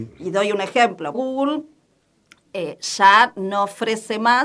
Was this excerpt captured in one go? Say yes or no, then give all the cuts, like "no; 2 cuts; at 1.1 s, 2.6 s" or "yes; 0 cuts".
no; 1 cut; at 1.1 s